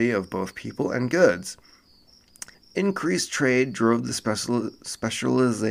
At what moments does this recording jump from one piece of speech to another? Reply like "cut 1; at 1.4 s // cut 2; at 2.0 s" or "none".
cut 1; at 2.5 s